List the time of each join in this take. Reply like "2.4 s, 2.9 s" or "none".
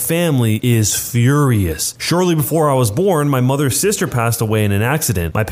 none